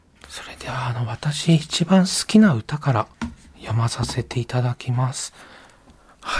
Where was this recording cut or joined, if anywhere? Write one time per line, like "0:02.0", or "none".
none

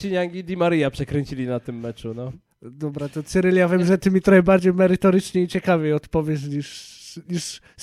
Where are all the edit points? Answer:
none

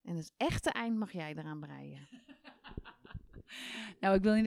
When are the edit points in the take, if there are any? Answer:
none

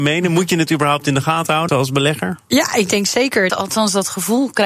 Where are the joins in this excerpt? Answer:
0:01.7
0:03.5

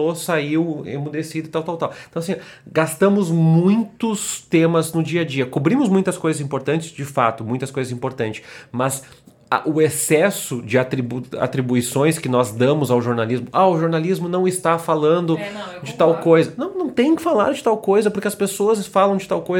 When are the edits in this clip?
none

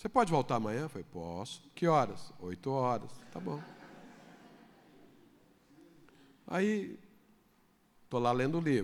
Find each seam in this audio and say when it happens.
0:01.7

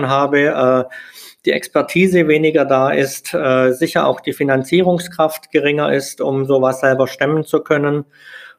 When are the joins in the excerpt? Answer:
none

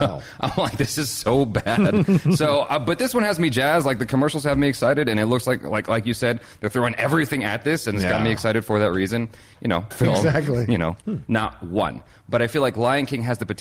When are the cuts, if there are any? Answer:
0:09.9
0:11.0

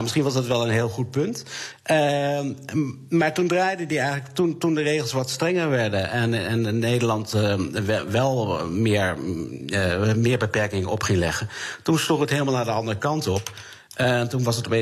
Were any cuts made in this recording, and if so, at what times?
none

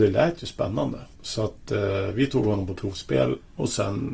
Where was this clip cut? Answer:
0:01.1

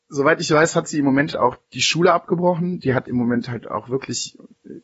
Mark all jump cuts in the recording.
0:01.3
0:03.1

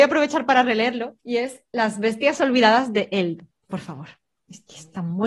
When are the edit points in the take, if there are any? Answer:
0:01.2

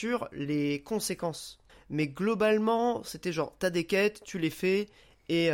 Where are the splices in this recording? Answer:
0:01.7

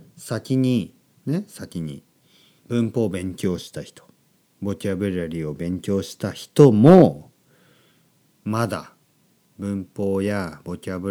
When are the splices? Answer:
0:02.6

